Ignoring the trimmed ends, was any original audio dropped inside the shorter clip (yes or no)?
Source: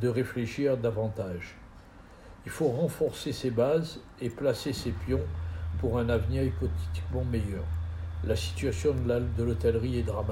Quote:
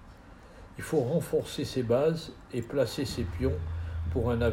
no